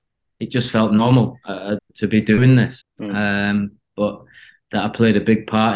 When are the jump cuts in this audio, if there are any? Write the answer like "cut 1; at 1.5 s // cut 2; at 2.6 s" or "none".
cut 1; at 1.8 s // cut 2; at 2.8 s